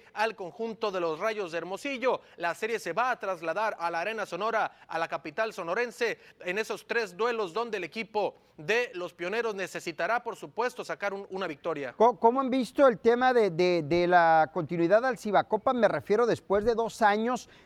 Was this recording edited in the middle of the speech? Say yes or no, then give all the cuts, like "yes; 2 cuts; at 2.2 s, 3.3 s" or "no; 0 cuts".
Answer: no; 0 cuts